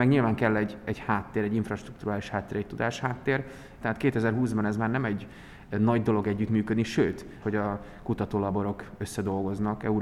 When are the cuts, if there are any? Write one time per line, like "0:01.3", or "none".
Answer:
0:03.8
0:07.4